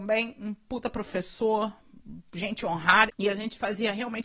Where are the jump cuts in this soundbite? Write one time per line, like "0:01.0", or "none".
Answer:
0:03.1